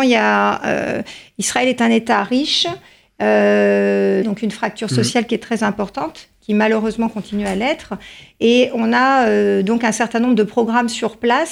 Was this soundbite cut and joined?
yes; 1 cut; at 4.2 s

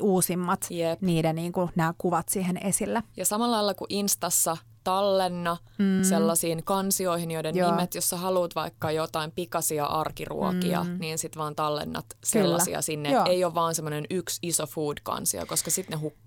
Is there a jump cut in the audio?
no; 0 cuts

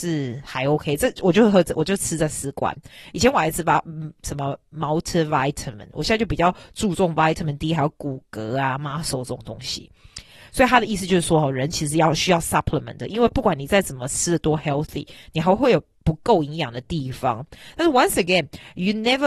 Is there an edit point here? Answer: no; 0 cuts

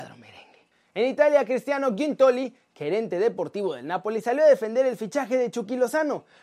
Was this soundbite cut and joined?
no; 0 cuts

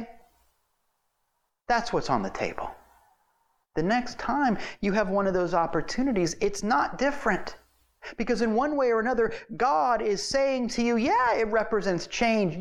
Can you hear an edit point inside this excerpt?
no; 0 cuts

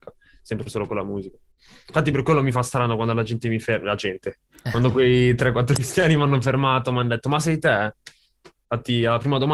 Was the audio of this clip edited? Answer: no; 0 cuts

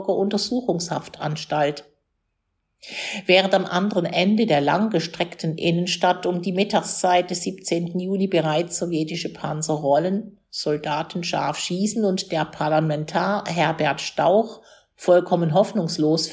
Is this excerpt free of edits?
yes; 0 cuts

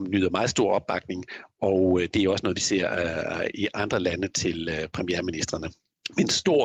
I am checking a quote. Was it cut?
no; 0 cuts

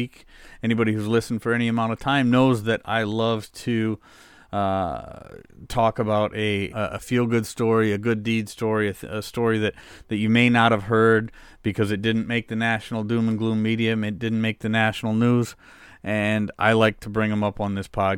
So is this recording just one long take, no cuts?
no; 1 cut; at 6.7 s

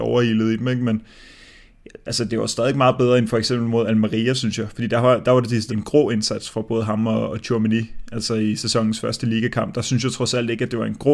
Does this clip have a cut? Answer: yes; 1 cut; at 5.7 s

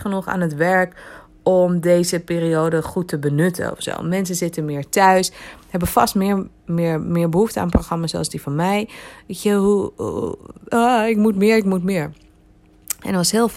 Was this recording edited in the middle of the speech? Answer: no; 0 cuts

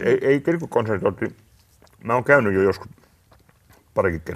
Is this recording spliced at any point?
no; 0 cuts

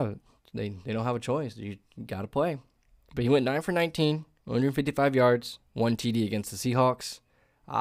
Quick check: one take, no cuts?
yes; 0 cuts

